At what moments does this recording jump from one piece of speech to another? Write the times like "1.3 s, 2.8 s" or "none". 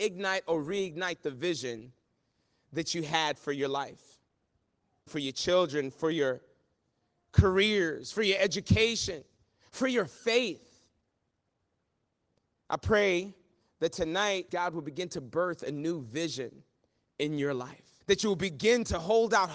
5.1 s, 14.5 s, 18.0 s